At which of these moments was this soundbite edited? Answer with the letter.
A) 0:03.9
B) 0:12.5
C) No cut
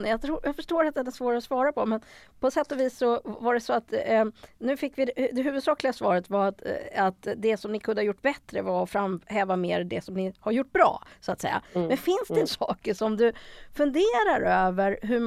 B